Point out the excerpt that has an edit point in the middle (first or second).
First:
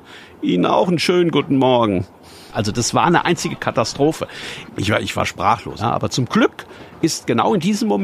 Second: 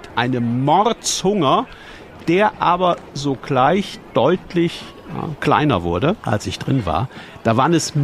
first